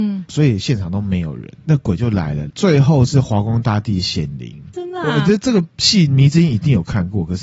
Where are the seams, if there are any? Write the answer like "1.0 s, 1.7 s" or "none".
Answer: 2.5 s, 4.7 s